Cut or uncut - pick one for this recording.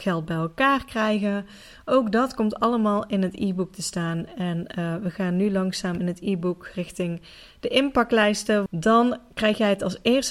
cut